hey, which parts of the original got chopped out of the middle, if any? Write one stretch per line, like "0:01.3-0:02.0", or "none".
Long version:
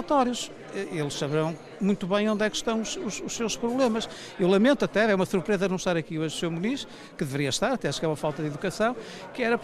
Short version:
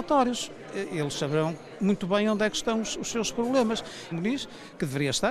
0:02.9-0:03.2
0:04.4-0:06.5